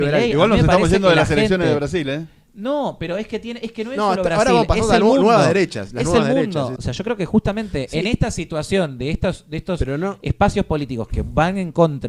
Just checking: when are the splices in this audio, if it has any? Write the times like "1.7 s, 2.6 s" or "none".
6.8 s